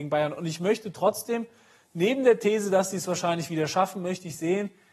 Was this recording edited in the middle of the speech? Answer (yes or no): no